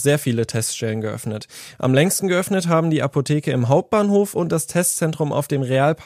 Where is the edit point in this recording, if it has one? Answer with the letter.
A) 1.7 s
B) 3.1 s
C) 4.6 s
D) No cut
D